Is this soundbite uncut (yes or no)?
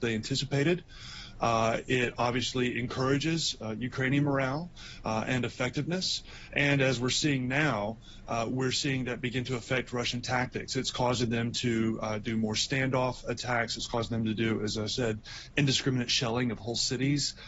yes